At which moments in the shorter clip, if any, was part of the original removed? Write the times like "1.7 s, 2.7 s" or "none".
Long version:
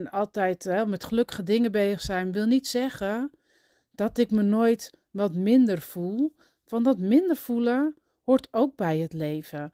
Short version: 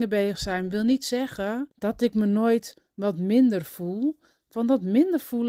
1.7 s

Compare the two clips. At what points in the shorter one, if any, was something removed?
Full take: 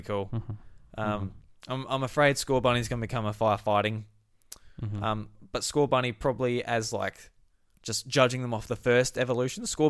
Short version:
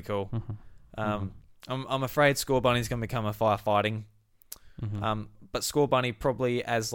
none

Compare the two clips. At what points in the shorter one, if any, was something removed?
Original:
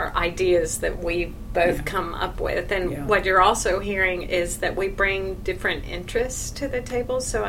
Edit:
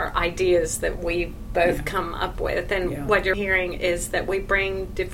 3.3 s

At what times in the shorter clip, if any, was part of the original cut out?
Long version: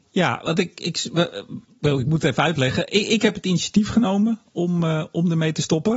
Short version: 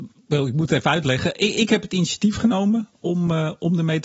none

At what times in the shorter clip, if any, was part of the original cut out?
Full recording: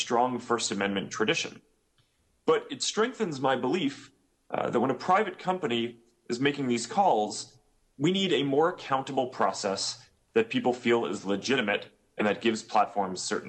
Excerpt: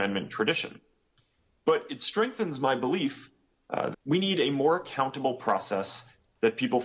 3.9 s

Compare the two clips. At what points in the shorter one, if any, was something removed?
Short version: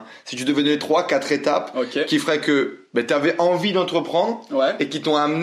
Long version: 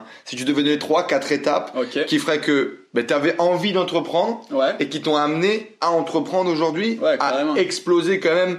none

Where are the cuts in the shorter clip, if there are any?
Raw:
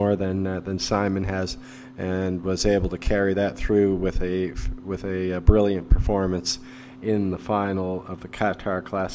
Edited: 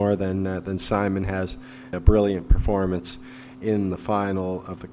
1.9 s

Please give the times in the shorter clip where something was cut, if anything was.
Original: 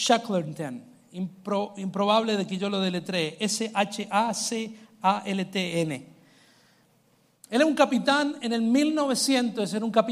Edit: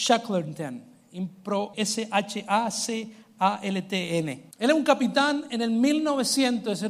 1.7 s, 4.5 s

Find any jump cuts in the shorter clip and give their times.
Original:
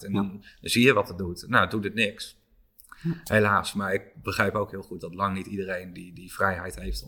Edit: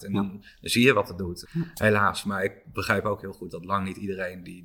1.4 s

